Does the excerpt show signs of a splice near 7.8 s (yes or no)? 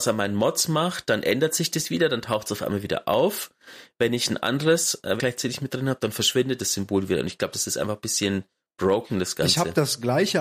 no